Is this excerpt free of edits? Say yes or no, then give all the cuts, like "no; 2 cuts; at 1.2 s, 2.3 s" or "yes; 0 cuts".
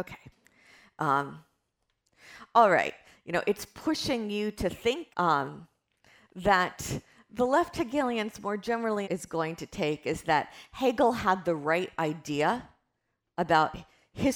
no; 3 cuts; at 3.1 s, 5.1 s, 9.0 s